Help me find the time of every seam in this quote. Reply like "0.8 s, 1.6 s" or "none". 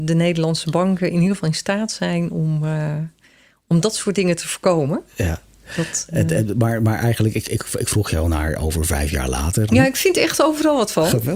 9.7 s